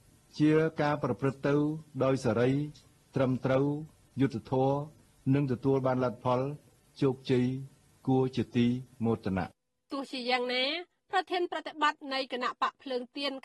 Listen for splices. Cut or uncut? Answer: uncut